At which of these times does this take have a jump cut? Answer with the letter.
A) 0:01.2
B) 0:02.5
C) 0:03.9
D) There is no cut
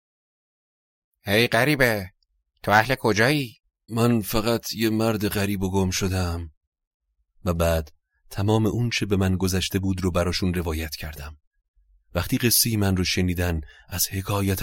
C